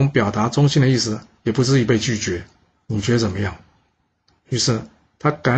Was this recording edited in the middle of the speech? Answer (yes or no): yes